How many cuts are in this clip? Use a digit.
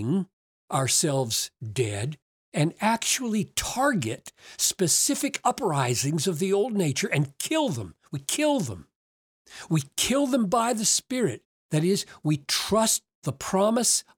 0